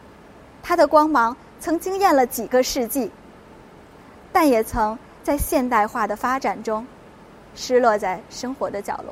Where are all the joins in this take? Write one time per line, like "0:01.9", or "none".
none